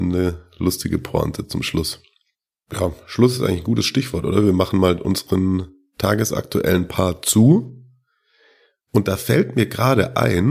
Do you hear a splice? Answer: no; 0 cuts

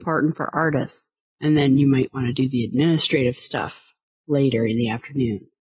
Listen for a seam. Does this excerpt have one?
yes; 1 cut; at 1.3 s

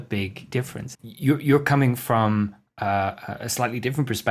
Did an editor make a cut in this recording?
yes; 1 cut; at 0.9 s

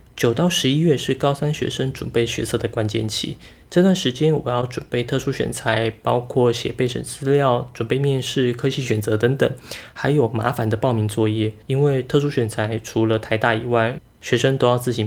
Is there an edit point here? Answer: yes; 1 cut; at 11.6 s

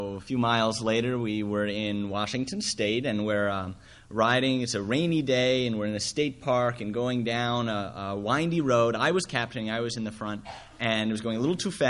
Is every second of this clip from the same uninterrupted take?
yes; 0 cuts

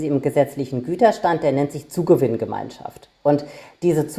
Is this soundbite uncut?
yes; 0 cuts

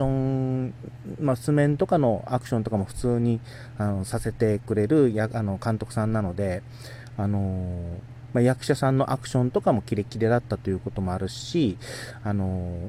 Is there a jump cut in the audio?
no; 0 cuts

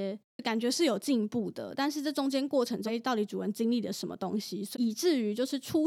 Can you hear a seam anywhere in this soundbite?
yes; 2 cuts; at 2.9 s, 4.7 s

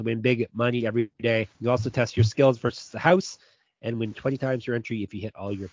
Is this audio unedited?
no; 1 cut; at 1.5 s

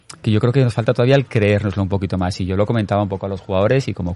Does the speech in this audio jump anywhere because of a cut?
no; 0 cuts

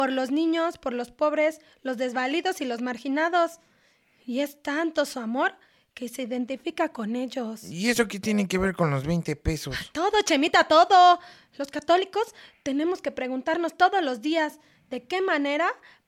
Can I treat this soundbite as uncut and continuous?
yes; 0 cuts

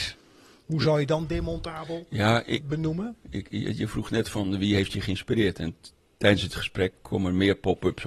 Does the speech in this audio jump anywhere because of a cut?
yes; 1 cut; at 2.6 s

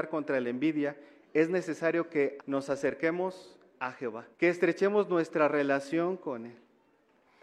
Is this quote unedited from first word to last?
no; 2 cuts; at 2.4 s, 4.3 s

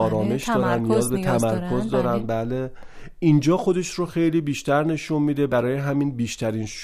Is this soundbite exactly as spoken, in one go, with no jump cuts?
yes; 0 cuts

